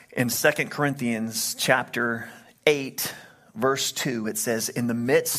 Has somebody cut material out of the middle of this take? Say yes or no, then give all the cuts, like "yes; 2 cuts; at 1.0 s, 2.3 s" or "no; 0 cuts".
no; 0 cuts